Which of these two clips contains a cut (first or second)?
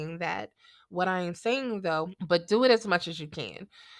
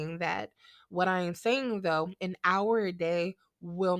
first